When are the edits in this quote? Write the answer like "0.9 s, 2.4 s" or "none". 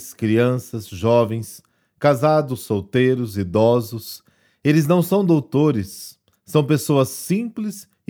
none